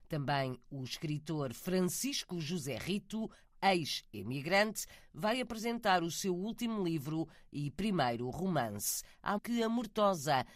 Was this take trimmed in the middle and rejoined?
yes; 1 cut; at 9.4 s

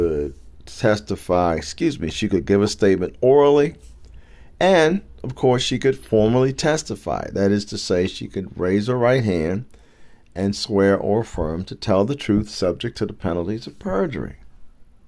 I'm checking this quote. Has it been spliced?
no; 0 cuts

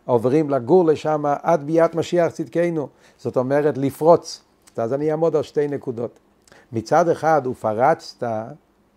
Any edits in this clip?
yes; 3 cuts; at 3.0 s, 4.7 s, 6.5 s

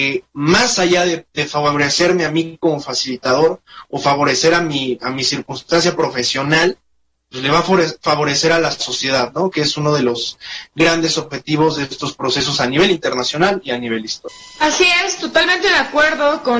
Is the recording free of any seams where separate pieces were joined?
yes; 0 cuts

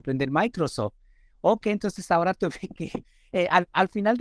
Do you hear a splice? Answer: no; 0 cuts

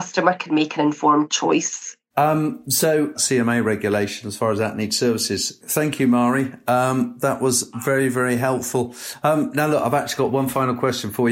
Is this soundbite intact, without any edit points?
no; 3 cuts; at 2.1 s, 3.1 s, 5.6 s

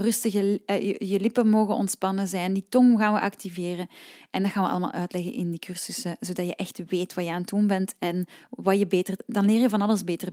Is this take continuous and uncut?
yes; 0 cuts

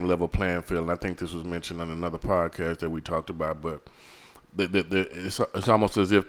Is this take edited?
no; 0 cuts

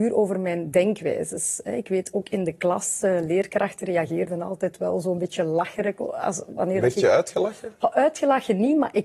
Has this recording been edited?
no; 0 cuts

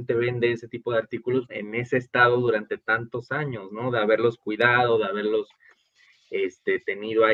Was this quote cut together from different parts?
yes; 1 cut; at 1.5 s

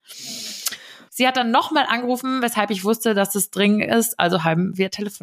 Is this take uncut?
no; 1 cut; at 1.1 s

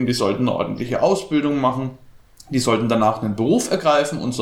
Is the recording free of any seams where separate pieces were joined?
yes; 0 cuts

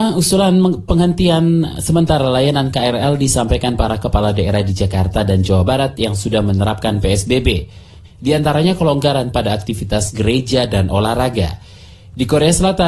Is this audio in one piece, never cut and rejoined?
no; 1 cut; at 8.0 s

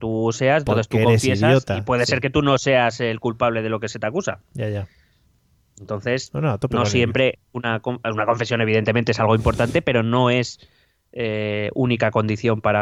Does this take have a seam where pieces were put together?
no; 0 cuts

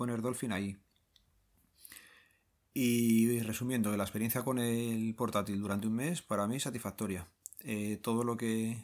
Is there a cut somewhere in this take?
no; 0 cuts

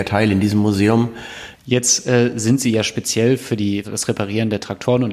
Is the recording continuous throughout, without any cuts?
no; 2 cuts; at 1.5 s, 3.8 s

